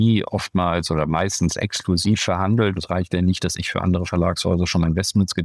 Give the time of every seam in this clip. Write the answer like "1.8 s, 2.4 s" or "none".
2.8 s